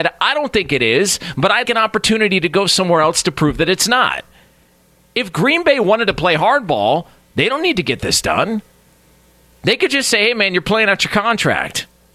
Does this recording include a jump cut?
yes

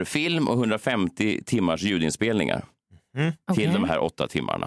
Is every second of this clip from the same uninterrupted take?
yes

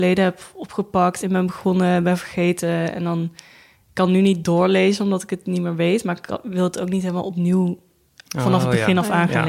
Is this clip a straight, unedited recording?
yes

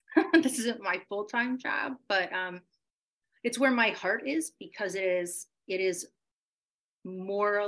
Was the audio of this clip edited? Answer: no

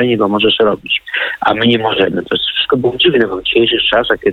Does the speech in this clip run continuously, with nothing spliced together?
yes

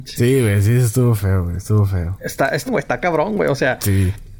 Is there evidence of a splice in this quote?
yes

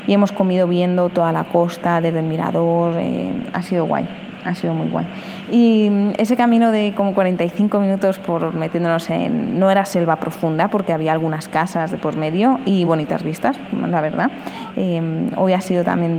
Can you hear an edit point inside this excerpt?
yes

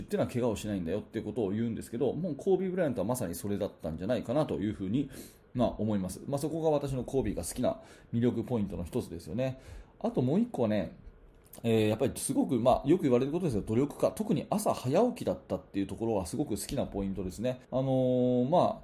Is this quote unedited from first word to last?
no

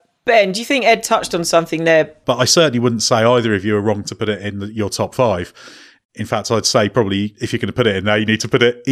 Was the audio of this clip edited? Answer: yes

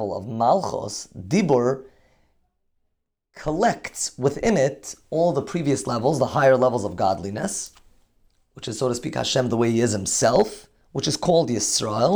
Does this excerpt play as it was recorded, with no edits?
yes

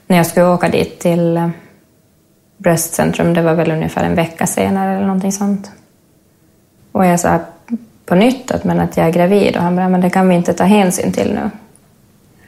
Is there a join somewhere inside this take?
yes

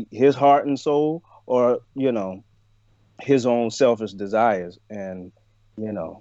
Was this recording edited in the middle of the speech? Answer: no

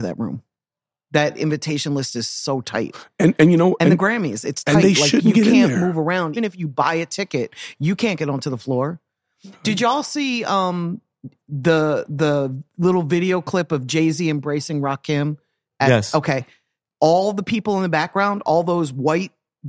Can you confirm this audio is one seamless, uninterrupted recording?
no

